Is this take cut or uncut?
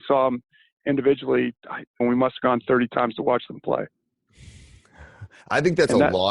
cut